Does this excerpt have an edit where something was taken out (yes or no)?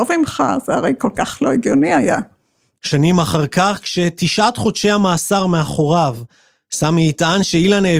yes